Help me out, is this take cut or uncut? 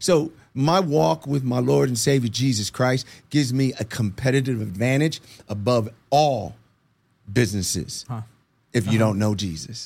cut